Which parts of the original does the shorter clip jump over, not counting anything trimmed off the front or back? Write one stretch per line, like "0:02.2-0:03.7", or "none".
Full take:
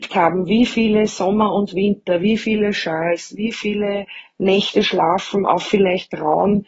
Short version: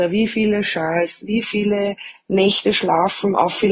none